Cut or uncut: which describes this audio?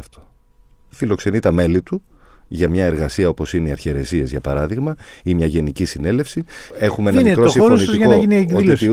cut